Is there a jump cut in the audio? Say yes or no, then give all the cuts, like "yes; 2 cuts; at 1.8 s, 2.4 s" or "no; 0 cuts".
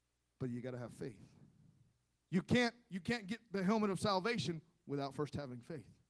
yes; 1 cut; at 2.2 s